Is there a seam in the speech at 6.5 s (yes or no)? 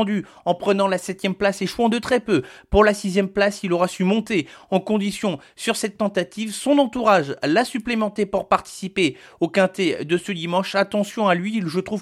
no